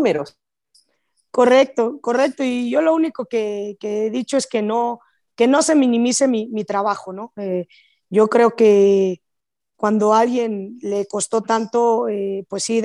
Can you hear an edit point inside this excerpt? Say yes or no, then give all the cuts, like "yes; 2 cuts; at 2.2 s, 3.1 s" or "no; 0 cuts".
no; 0 cuts